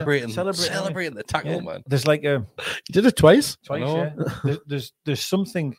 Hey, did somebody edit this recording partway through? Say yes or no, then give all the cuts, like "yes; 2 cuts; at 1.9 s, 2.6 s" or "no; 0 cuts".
no; 0 cuts